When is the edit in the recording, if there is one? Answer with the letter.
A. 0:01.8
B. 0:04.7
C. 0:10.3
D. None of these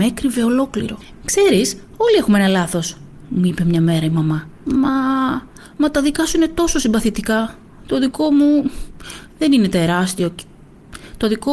B